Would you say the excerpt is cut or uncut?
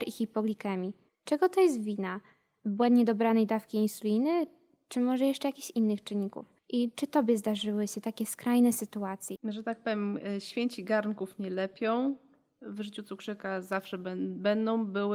cut